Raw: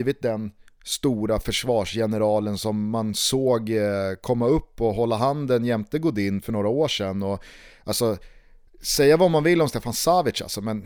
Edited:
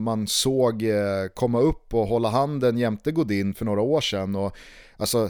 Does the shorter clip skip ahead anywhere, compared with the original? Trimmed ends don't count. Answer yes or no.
no